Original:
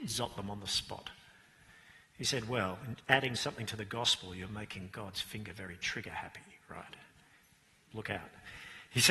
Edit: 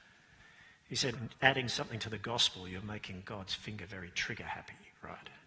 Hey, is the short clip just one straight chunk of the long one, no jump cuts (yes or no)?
no